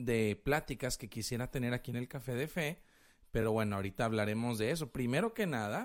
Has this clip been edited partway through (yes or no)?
no